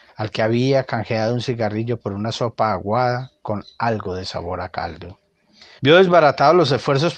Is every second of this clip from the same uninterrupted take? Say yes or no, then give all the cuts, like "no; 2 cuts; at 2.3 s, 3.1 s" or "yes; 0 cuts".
no; 1 cut; at 5.8 s